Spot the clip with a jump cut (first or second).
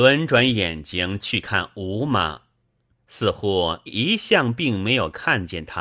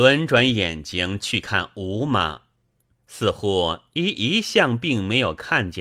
first